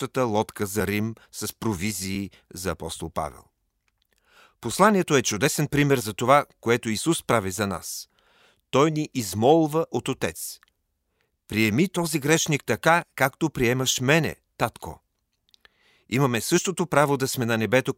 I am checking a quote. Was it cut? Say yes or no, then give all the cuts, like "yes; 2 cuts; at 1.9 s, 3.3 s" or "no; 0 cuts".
no; 0 cuts